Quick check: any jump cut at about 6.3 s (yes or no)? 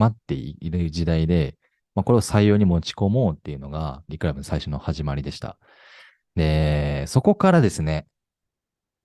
yes